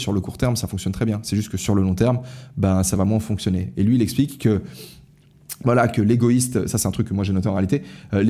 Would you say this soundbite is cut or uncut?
uncut